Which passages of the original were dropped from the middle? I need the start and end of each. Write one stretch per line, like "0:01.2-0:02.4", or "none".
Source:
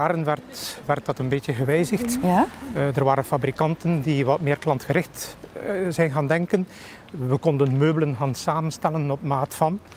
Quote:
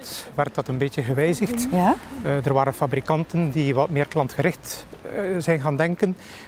none